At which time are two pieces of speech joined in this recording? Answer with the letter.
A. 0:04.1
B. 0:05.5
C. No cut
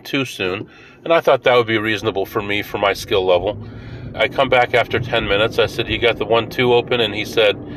A